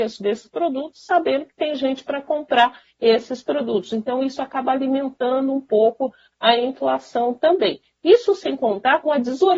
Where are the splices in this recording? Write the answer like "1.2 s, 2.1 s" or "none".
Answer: none

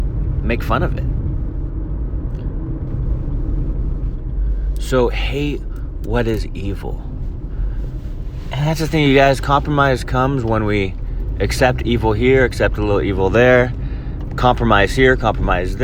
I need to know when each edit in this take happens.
14.3 s

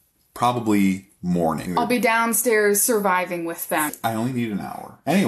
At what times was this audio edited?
1.7 s, 3.9 s

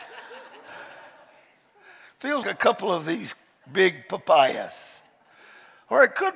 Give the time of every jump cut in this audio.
2.4 s

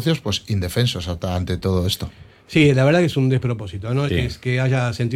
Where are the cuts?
4.1 s

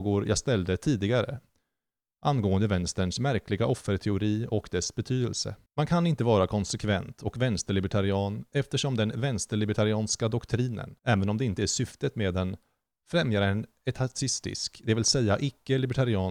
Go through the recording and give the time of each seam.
5.7 s, 11.0 s

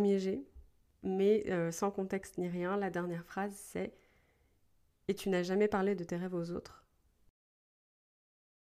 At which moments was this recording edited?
none

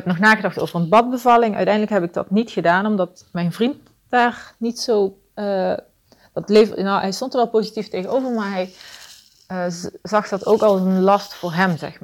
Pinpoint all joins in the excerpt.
none

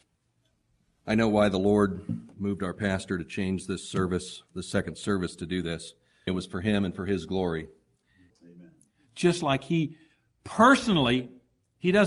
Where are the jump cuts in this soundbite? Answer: 6.3 s, 8.3 s

